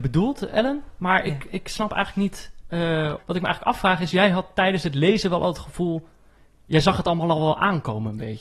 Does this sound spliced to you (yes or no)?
yes